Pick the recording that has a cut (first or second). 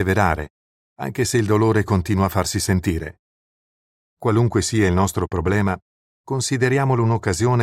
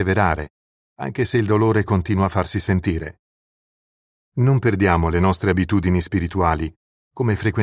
first